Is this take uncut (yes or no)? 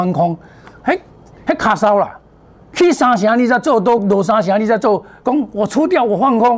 yes